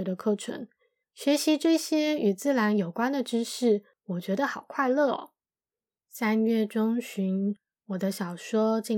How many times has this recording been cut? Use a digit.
2